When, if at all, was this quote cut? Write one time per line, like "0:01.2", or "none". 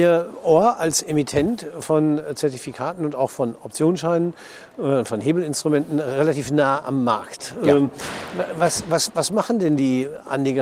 none